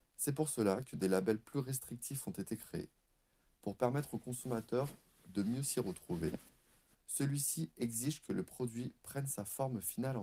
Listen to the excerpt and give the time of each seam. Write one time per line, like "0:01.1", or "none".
0:06.9